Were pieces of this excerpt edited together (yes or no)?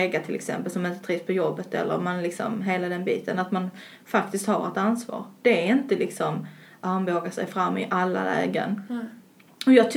no